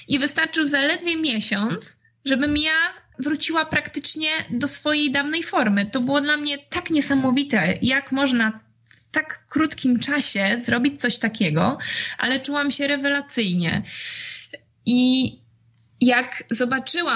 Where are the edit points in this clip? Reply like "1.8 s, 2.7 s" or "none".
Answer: none

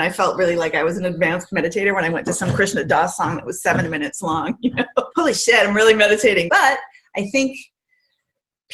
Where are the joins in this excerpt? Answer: 5.1 s, 6.5 s

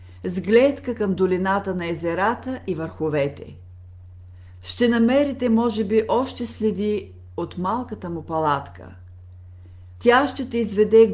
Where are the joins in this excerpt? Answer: 4.5 s, 10.0 s

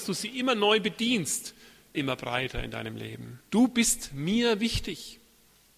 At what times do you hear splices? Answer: 1.9 s, 3.5 s

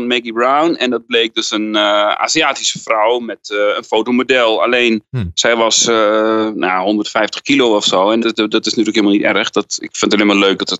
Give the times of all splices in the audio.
8.2 s

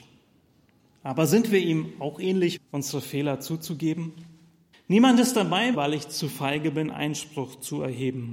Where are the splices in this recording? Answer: 2.6 s, 4.7 s, 5.7 s

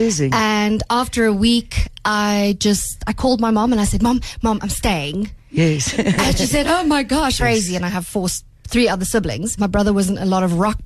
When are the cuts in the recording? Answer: 7.4 s, 9.6 s

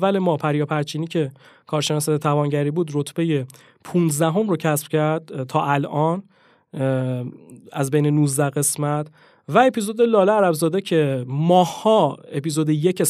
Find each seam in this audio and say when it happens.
none

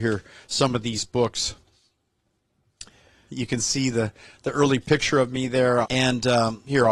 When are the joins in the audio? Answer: 3.3 s, 5.8 s

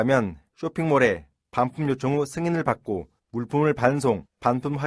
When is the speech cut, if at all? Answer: none

